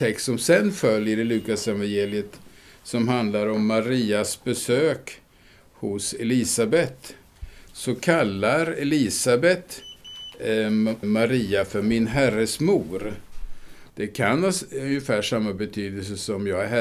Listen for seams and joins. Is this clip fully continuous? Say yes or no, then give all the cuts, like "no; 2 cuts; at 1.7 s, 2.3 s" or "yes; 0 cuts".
no; 2 cuts; at 11.0 s, 13.9 s